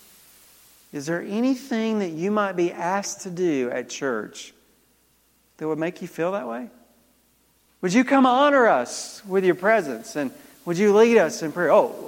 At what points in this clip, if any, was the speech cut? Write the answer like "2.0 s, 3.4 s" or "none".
7.7 s